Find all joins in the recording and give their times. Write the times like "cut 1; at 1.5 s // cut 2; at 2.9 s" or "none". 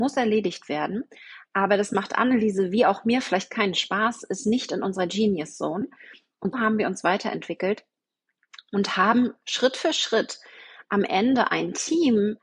cut 1; at 6.5 s